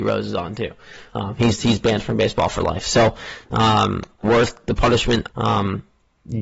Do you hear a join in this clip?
yes; 2 cuts; at 4.2 s, 5.3 s

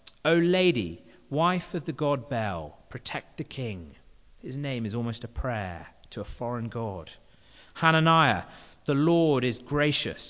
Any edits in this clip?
no; 0 cuts

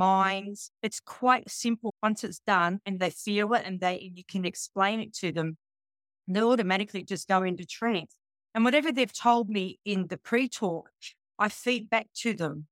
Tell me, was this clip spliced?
no; 0 cuts

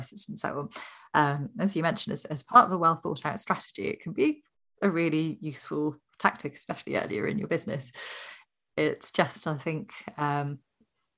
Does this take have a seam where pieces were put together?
no; 0 cuts

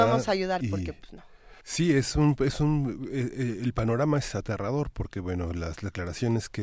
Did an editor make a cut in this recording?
yes; 1 cut; at 1.6 s

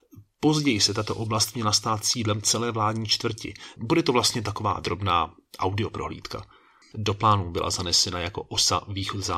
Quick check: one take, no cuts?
no; 2 cuts; at 3.8 s, 6.9 s

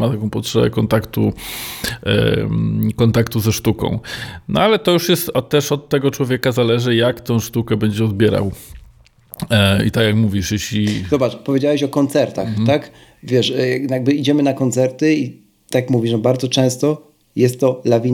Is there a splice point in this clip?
no; 0 cuts

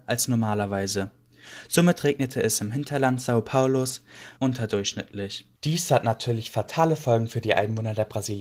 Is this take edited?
yes; 2 cuts; at 4.4 s, 5.5 s

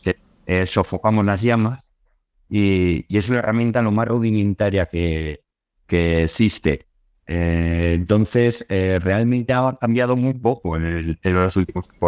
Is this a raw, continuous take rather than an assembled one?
yes; 0 cuts

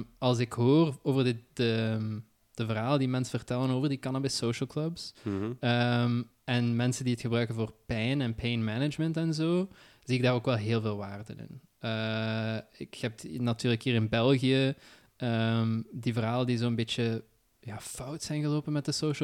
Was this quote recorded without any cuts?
yes; 0 cuts

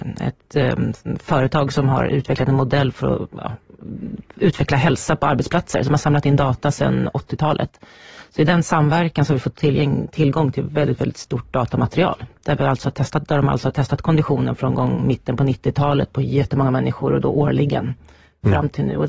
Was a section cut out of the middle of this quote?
no; 0 cuts

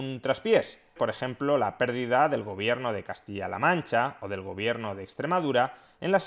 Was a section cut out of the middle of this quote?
yes; 1 cut; at 1.0 s

